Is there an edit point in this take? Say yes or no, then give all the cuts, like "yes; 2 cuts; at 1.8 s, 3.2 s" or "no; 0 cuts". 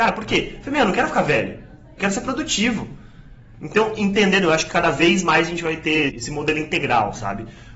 yes; 2 cuts; at 3.5 s, 6.1 s